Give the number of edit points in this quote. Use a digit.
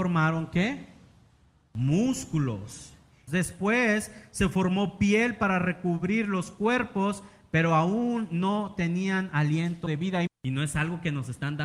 2